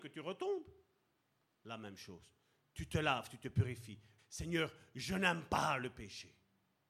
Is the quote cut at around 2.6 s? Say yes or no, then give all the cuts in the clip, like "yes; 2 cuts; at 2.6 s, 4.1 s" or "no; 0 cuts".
no; 1 cut; at 4.2 s